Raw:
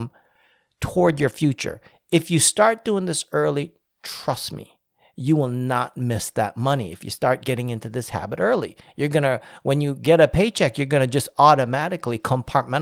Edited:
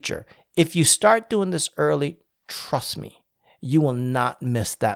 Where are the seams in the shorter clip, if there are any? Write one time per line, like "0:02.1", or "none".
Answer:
none